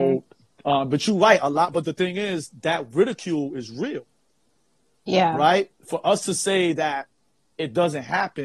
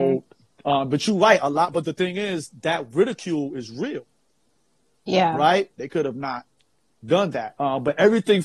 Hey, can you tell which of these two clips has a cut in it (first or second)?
second